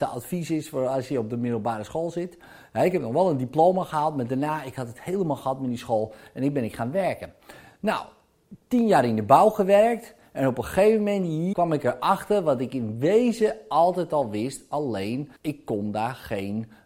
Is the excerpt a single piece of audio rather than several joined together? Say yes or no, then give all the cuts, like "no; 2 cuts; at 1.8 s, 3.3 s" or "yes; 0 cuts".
no; 2 cuts; at 11.5 s, 15.4 s